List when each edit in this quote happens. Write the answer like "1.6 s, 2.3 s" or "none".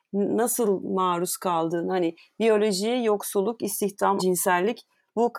4.2 s